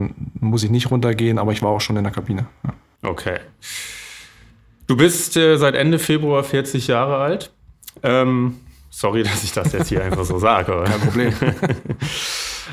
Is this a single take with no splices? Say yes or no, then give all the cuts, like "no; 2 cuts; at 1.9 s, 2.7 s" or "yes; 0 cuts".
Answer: yes; 0 cuts